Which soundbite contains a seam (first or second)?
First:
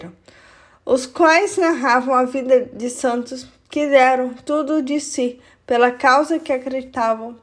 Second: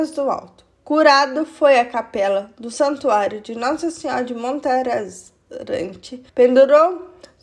second